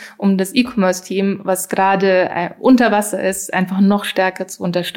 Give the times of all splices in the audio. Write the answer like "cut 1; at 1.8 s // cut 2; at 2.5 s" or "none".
none